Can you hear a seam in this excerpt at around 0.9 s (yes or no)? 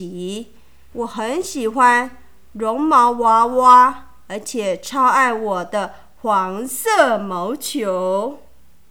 yes